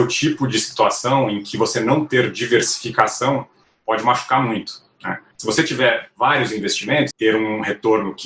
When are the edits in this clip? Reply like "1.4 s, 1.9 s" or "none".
5.3 s, 7.1 s